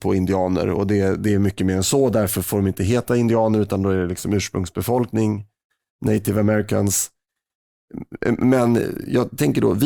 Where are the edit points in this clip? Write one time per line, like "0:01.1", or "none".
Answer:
none